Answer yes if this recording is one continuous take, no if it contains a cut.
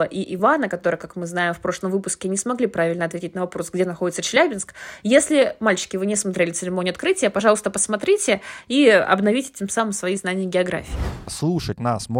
yes